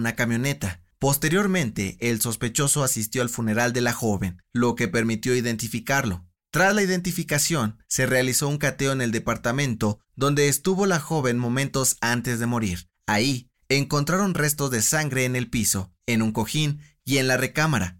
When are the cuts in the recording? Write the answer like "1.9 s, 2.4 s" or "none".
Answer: none